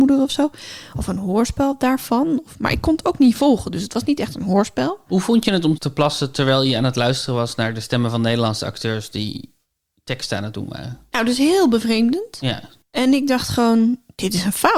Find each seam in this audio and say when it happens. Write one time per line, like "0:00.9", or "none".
0:05.8